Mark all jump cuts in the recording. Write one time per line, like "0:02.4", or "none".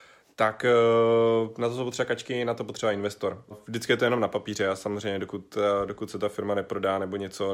0:03.5